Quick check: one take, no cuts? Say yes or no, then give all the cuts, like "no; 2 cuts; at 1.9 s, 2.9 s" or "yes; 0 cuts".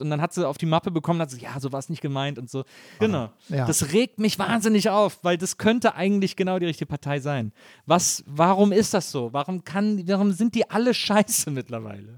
no; 1 cut; at 3.0 s